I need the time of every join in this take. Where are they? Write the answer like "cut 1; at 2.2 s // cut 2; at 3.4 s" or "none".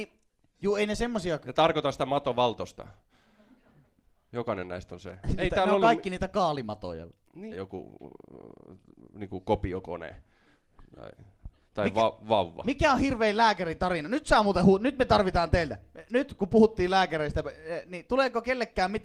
cut 1; at 7.5 s // cut 2; at 11.7 s

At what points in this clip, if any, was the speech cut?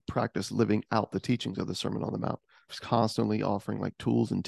cut 1; at 2.7 s

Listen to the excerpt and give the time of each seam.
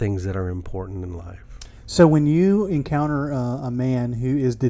none

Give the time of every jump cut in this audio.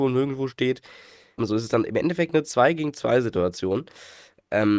cut 1; at 1.4 s

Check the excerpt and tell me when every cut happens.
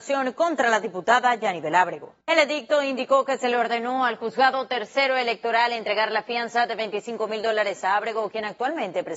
cut 1; at 2.2 s

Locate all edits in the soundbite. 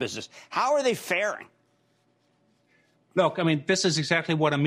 none

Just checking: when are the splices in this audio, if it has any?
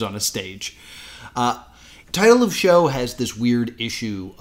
cut 1; at 2.0 s

